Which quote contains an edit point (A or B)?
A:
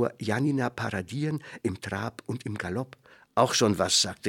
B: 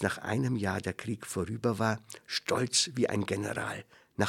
A